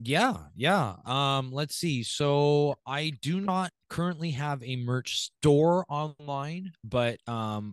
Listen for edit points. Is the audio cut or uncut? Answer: uncut